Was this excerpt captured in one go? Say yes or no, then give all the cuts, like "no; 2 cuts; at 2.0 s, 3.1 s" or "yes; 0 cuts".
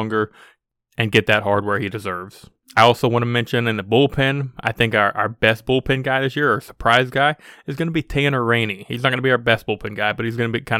yes; 0 cuts